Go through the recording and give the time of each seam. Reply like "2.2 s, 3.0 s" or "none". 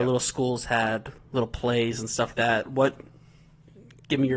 2.3 s